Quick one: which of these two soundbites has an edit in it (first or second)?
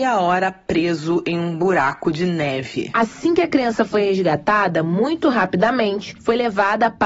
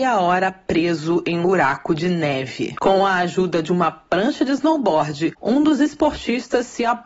second